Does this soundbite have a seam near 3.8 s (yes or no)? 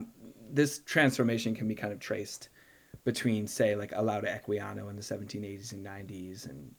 no